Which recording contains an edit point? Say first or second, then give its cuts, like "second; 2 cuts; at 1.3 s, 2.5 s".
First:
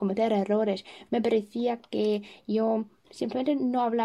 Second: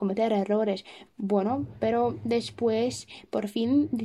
second; 1 cut; at 1.1 s